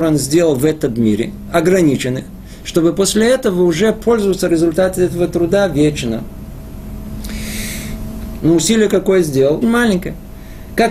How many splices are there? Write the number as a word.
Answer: two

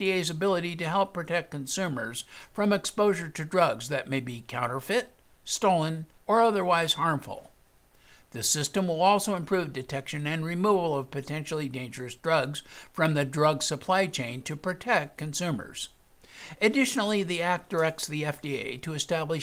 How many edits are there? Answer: one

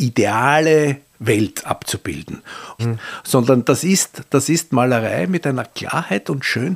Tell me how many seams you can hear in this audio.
one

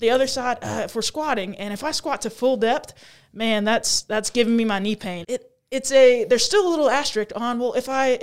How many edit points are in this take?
one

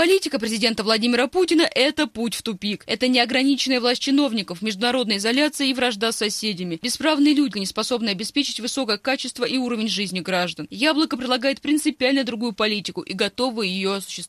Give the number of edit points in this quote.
one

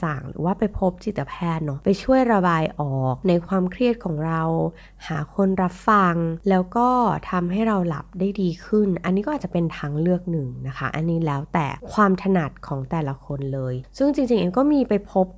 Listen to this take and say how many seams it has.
zero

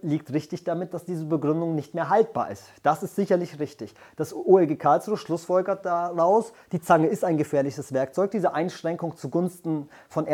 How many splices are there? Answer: zero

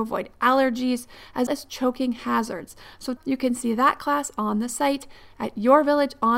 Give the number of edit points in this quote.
two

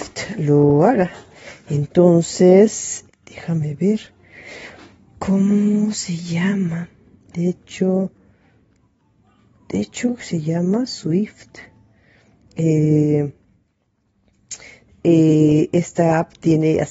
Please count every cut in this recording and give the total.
one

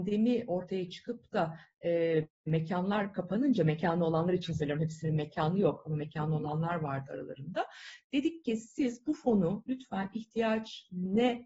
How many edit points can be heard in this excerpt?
zero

